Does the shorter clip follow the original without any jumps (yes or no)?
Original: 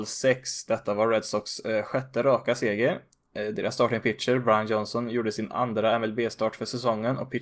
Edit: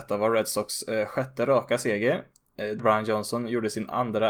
no